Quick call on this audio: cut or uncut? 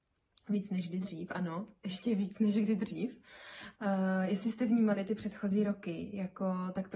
cut